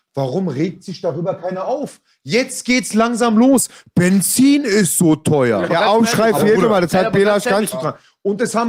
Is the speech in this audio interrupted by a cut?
yes; 2 cuts; at 5.7 s, 7.7 s

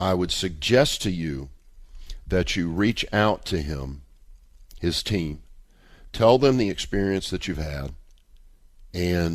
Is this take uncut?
yes; 0 cuts

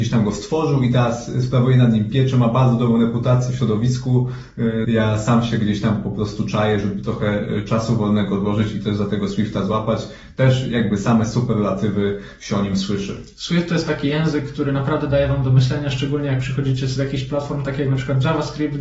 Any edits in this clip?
yes; 1 cut; at 4.8 s

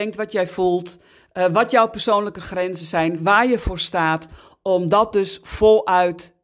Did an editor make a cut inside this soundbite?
no; 0 cuts

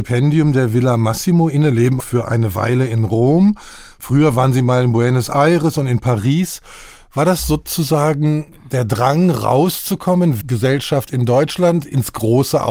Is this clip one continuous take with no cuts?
no; 2 cuts; at 2.0 s, 10.4 s

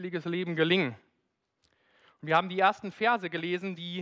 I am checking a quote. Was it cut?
no; 0 cuts

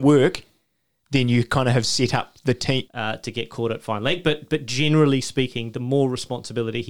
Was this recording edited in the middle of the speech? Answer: yes; 1 cut; at 2.8 s

